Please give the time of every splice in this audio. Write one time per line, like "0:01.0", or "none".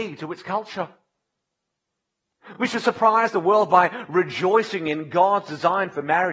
none